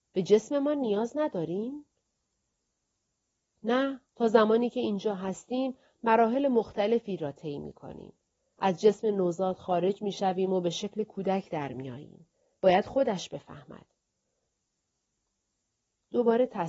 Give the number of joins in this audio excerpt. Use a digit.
1